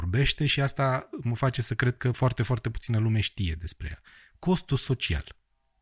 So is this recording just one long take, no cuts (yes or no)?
yes